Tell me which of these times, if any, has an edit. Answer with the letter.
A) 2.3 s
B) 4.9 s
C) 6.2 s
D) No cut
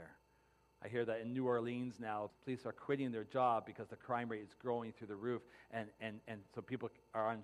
A